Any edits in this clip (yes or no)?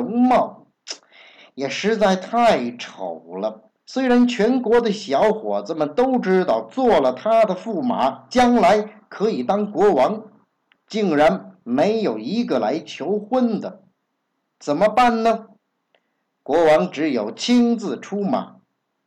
no